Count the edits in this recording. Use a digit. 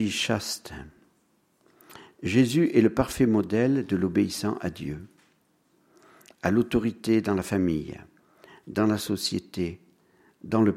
0